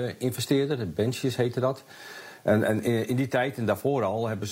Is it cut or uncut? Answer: uncut